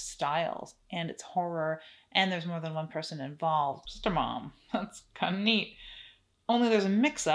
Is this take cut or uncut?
cut